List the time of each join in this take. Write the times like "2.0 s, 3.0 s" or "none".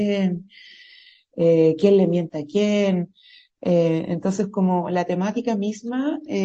none